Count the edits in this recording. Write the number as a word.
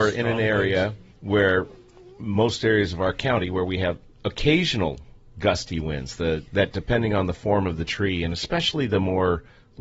two